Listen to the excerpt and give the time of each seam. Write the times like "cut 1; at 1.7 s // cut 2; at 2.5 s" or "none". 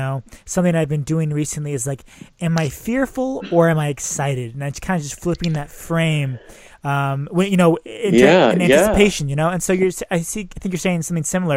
none